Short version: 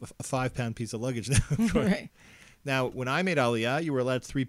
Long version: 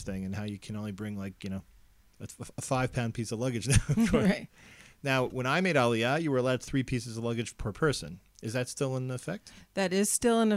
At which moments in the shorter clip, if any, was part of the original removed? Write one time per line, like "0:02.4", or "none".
none